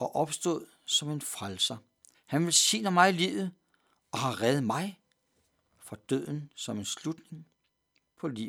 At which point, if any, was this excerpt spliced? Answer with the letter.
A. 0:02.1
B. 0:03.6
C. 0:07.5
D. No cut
A